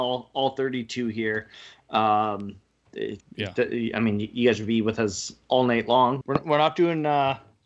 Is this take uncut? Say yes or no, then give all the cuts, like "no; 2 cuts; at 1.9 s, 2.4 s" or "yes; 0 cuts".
no; 2 cuts; at 3.2 s, 6.2 s